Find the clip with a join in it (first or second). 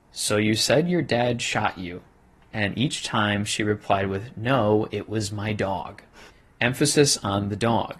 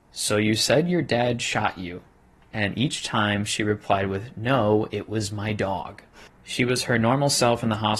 second